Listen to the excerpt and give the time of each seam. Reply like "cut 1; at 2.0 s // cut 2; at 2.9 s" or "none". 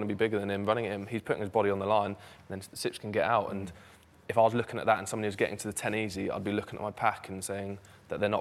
cut 1; at 2.3 s